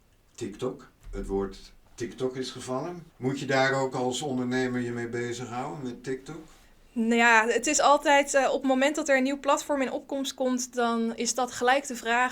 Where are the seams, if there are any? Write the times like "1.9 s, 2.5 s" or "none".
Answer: 3.1 s